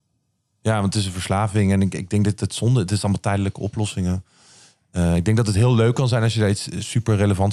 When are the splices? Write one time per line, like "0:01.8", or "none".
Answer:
none

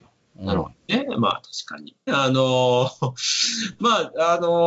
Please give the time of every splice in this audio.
0:02.1

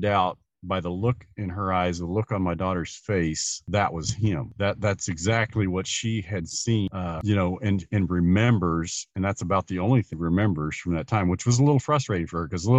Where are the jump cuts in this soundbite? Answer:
none

